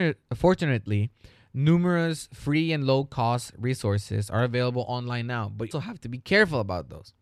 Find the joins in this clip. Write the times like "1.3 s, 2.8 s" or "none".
5.7 s